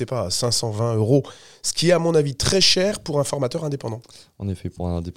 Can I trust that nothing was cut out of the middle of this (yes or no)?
yes